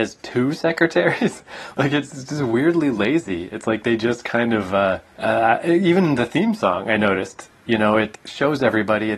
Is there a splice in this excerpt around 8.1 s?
yes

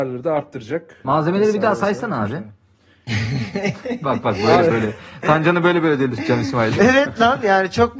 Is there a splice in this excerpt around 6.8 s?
yes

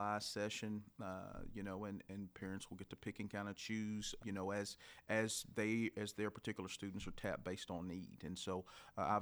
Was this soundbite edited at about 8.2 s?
no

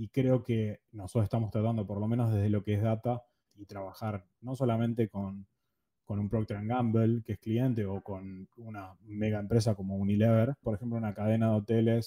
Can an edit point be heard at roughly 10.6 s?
yes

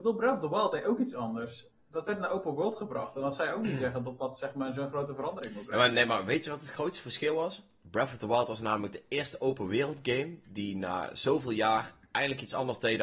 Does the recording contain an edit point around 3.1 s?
no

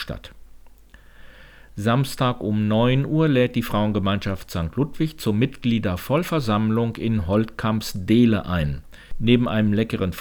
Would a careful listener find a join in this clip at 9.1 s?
no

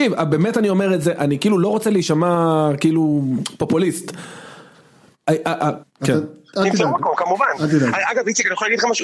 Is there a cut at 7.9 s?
no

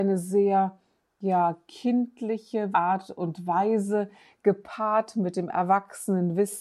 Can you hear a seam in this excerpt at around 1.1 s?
no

